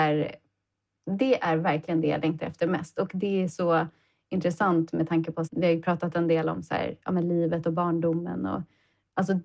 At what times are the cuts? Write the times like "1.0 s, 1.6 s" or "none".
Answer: 5.5 s